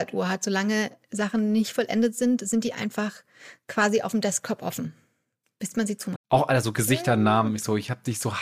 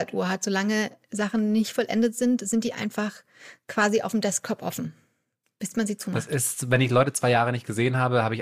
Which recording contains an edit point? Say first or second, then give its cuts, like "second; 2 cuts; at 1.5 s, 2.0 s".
first; 1 cut; at 6.1 s